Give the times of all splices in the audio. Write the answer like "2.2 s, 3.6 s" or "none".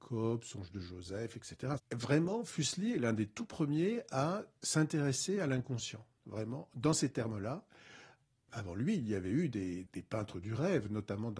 1.8 s, 9.9 s